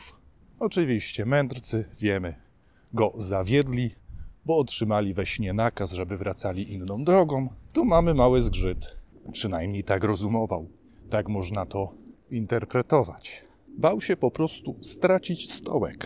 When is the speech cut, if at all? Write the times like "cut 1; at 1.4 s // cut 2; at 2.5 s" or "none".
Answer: cut 1; at 7.7 s // cut 2; at 9.1 s